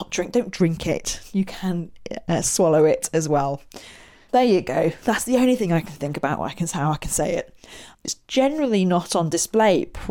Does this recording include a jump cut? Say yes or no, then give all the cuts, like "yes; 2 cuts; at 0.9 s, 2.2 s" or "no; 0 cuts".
yes; 2 cuts; at 4.3 s, 8.0 s